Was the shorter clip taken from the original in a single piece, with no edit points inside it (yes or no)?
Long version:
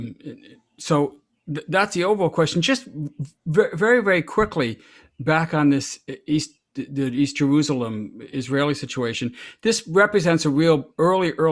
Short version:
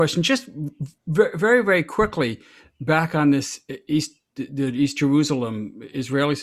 yes